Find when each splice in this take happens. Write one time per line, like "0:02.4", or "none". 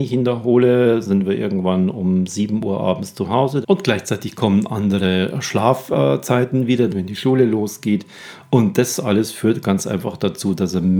0:03.6
0:06.9